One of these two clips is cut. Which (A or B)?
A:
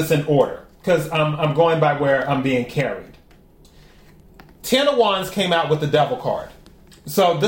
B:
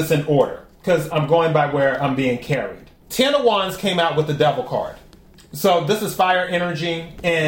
B